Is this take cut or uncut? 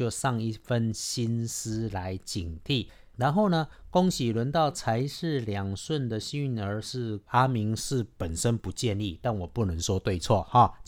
cut